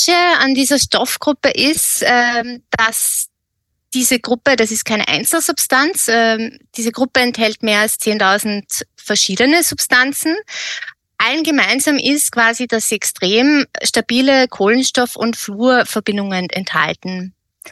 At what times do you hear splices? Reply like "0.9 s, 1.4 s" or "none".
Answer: 6.1 s

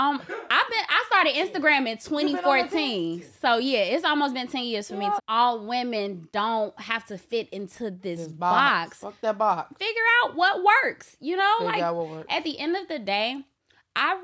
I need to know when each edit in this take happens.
5.2 s

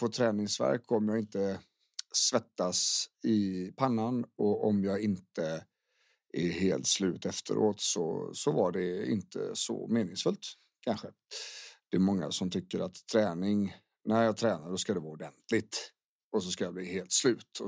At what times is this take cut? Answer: none

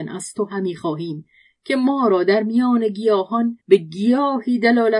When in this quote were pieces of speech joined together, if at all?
3.6 s

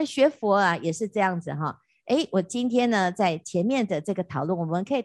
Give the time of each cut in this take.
none

